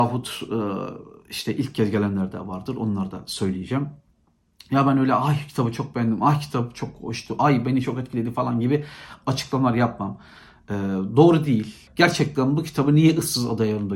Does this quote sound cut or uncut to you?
cut